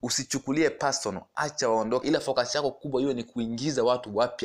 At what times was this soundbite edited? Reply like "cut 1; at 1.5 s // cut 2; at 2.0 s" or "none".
cut 1; at 2.0 s